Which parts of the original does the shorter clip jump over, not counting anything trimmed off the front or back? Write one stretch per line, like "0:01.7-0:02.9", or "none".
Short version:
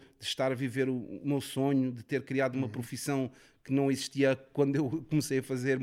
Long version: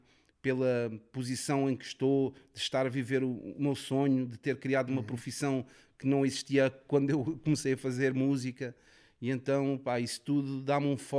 none